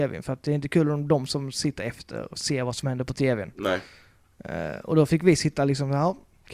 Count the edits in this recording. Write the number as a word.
zero